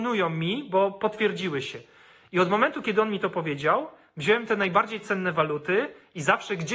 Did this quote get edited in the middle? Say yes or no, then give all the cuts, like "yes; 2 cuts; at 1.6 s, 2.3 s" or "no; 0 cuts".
no; 0 cuts